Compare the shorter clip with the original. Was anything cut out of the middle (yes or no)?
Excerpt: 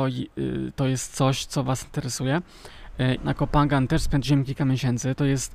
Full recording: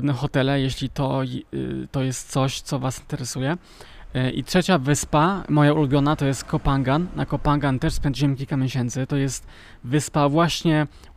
yes